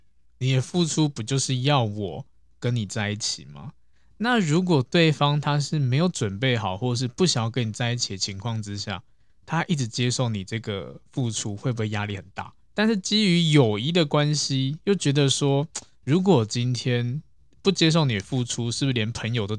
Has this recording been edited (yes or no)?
yes